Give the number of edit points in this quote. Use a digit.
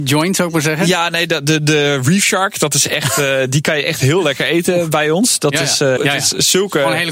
1